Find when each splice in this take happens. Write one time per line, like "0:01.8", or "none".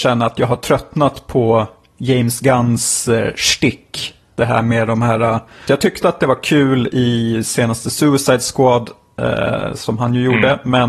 0:05.6